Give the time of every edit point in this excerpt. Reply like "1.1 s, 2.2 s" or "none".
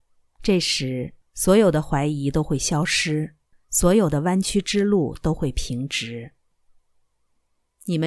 1.2 s, 3.5 s